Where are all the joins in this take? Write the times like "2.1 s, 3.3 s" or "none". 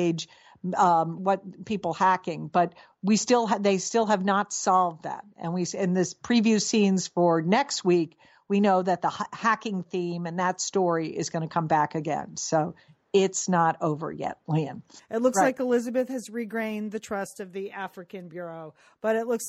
1.2 s, 15.0 s